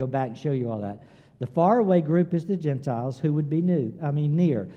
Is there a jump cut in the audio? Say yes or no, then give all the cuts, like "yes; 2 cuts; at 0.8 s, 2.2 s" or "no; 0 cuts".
no; 0 cuts